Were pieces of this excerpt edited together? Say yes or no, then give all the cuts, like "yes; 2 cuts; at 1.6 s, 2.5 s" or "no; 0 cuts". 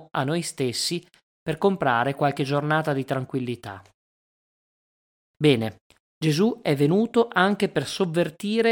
no; 0 cuts